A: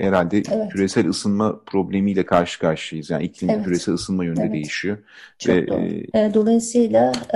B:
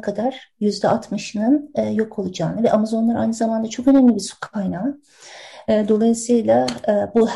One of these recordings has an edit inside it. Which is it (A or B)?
A